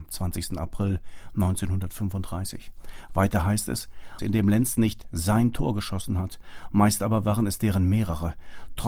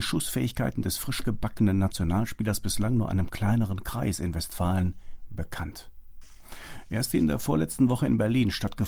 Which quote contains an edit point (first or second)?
first